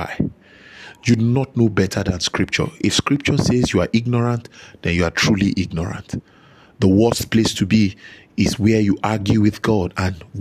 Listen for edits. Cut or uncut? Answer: uncut